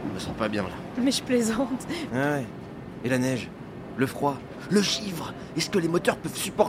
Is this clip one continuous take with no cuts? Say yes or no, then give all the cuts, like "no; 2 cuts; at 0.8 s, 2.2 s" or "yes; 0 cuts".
no; 1 cut; at 2.1 s